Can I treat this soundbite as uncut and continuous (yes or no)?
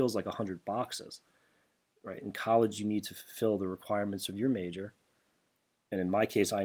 yes